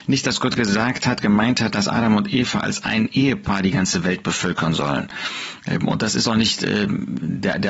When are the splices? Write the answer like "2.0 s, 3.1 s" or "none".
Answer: none